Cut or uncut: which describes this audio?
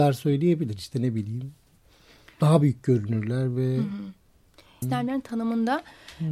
cut